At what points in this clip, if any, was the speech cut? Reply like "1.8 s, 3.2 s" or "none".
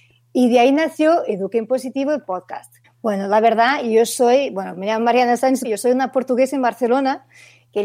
2.8 s, 5.6 s